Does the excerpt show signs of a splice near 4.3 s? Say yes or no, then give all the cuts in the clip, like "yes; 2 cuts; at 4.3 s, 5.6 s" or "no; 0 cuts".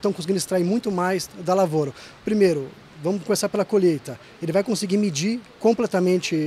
no; 1 cut; at 2.1 s